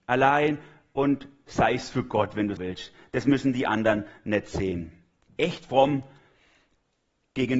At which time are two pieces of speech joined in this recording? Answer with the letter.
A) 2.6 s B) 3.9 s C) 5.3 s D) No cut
A